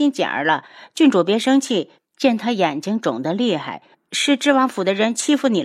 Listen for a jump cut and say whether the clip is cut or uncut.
cut